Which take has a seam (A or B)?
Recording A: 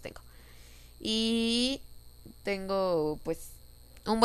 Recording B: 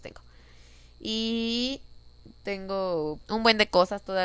B